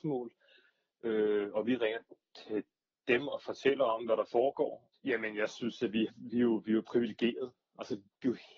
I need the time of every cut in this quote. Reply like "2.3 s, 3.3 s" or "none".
4.9 s, 6.1 s